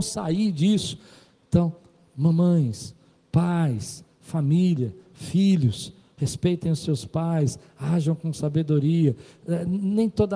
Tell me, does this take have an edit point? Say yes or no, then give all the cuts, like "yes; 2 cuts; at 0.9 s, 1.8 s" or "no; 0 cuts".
no; 0 cuts